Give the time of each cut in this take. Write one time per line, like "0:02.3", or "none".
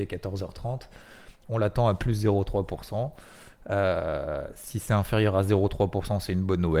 none